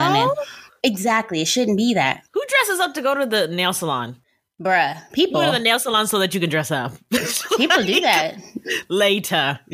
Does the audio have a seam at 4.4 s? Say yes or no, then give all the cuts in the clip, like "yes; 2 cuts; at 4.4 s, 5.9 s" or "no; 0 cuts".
no; 1 cut; at 2.3 s